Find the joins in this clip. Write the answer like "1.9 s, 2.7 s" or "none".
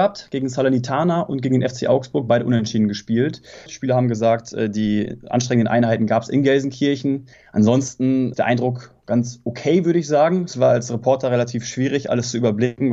3.7 s

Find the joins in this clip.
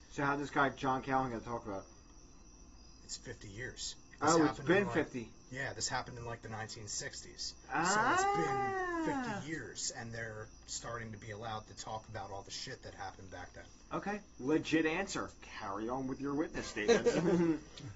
none

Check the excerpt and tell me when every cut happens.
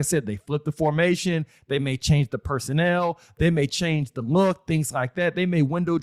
none

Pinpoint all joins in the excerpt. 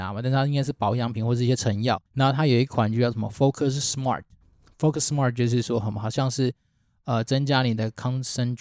2.1 s

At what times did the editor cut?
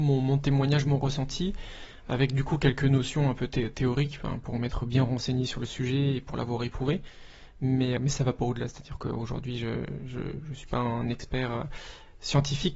8.0 s

